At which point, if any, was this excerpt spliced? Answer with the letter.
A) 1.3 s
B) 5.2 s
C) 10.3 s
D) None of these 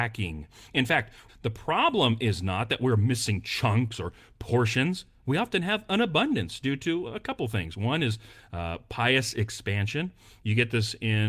A